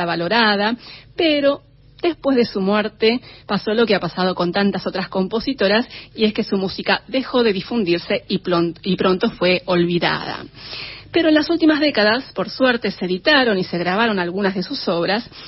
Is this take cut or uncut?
uncut